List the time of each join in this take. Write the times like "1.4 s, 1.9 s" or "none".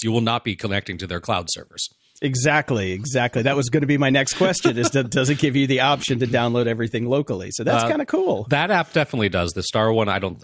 none